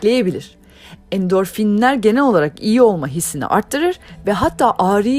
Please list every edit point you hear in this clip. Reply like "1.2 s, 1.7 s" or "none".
none